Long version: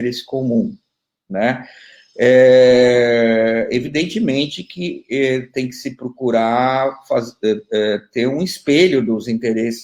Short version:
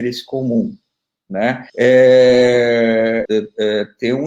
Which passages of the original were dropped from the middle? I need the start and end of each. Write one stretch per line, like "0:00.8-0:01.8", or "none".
0:01.7-0:02.1
0:03.7-0:07.4